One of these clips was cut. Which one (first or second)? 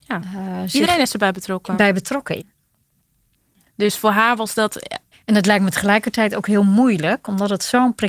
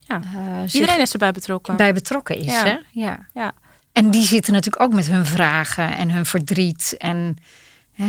first